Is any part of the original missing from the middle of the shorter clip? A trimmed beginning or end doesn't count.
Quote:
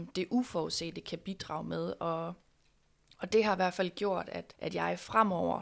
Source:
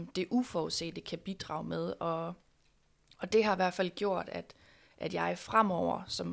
yes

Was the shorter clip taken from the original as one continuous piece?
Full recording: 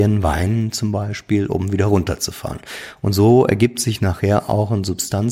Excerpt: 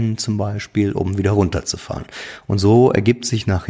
yes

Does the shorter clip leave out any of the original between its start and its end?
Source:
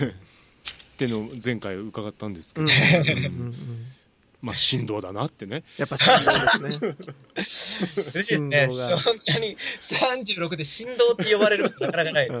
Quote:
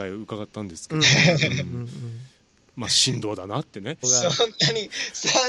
yes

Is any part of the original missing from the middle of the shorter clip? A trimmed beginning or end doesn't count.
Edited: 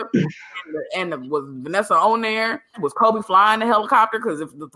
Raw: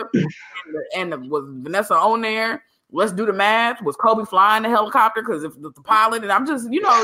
yes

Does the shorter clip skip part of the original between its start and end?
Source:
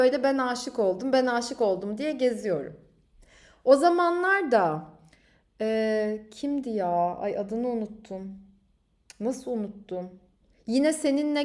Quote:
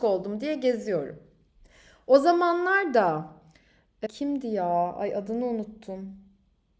yes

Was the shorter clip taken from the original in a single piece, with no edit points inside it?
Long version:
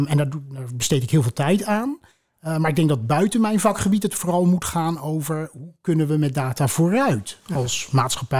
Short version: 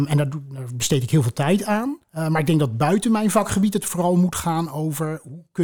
no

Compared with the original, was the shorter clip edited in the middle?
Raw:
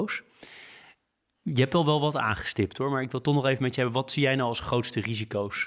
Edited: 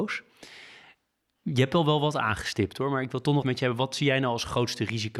yes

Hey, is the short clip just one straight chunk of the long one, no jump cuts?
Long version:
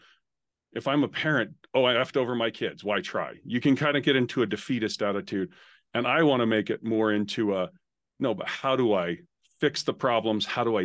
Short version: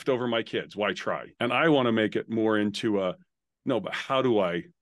no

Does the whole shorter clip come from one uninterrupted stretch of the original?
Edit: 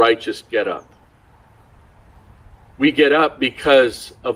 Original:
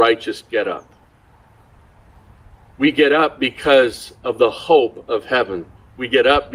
yes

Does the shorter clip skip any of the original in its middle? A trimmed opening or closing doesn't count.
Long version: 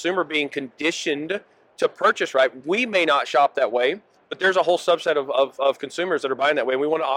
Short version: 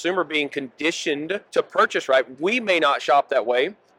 yes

